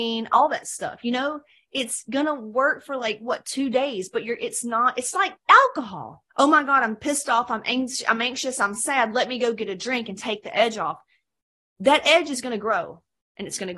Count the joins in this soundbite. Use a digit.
1